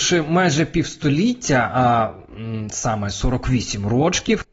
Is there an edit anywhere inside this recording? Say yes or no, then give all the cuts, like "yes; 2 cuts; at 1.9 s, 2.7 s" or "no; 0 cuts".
no; 0 cuts